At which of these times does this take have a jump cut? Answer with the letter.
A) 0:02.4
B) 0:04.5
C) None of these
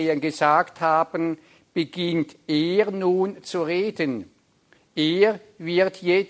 C